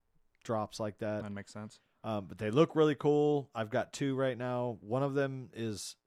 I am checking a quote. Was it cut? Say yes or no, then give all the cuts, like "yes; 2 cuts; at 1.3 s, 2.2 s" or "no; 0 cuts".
no; 0 cuts